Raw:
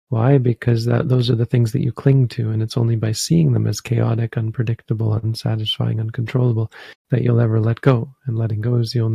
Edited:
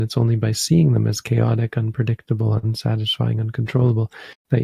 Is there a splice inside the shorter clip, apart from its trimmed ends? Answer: no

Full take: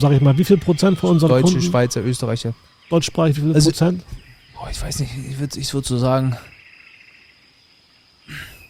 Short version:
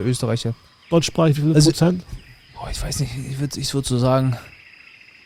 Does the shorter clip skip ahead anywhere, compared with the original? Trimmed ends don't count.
no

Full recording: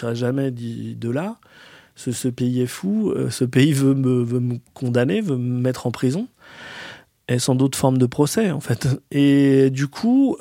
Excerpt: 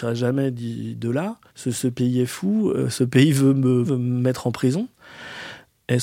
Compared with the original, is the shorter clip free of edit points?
no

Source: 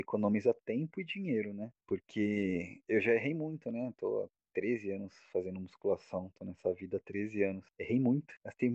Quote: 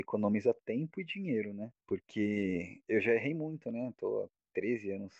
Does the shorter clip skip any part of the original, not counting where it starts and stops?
no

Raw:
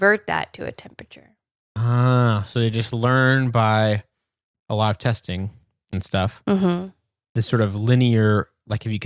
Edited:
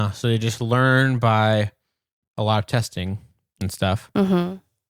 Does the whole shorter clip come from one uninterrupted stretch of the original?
yes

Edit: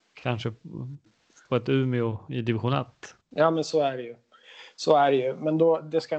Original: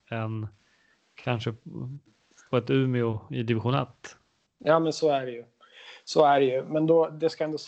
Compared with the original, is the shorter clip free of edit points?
no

